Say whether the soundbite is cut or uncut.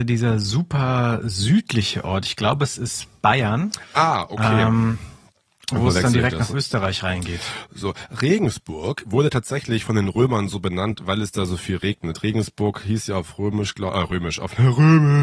uncut